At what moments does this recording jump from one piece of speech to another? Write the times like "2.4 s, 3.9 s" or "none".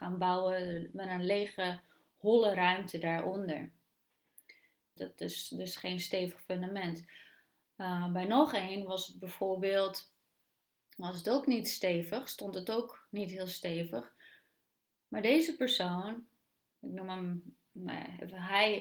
5.0 s